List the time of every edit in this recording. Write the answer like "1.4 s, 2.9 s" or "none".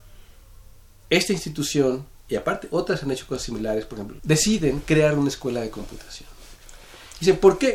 4.2 s